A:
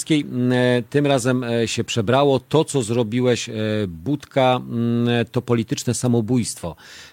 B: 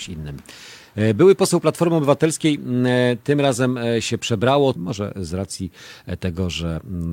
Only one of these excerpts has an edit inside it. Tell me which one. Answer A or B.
B